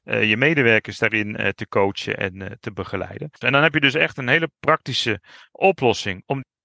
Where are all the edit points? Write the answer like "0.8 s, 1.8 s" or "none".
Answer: 3.4 s